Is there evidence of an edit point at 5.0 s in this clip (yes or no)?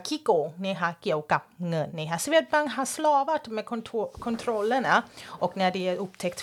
no